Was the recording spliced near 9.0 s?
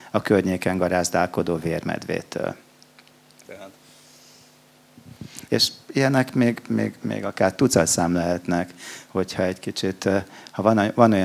no; 2 cuts; at 3.5 s, 5.5 s

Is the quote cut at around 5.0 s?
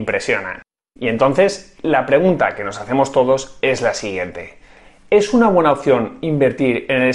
no; 1 cut; at 1.0 s

